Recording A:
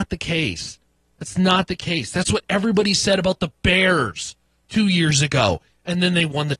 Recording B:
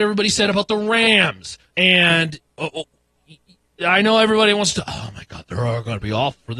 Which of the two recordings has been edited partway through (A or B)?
B